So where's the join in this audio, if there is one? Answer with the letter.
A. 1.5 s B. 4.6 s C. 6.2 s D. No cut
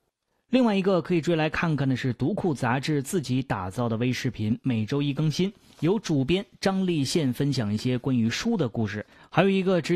D